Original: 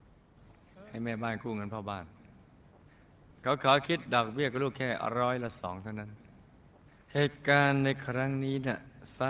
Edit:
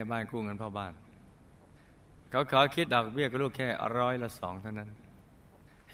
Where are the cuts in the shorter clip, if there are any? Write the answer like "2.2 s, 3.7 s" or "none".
2.9 s